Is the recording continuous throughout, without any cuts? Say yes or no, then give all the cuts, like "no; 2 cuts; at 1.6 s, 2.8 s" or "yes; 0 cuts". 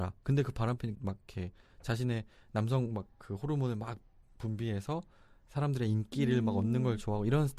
no; 1 cut; at 0.9 s